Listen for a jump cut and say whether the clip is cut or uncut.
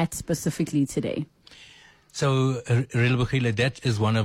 uncut